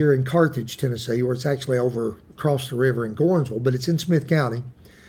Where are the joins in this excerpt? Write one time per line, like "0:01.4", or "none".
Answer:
none